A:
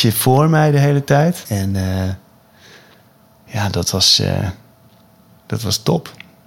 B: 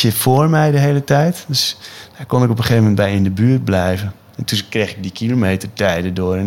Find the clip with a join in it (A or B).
A